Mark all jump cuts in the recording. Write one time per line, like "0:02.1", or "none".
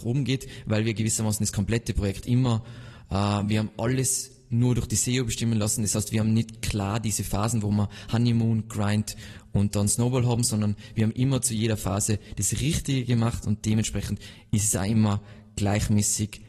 none